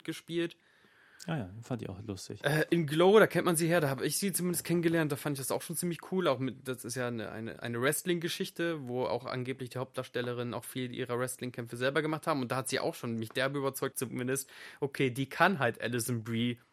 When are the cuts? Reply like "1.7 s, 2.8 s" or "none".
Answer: 13.9 s